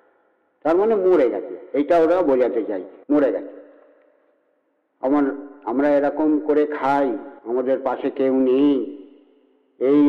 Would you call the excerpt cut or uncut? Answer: cut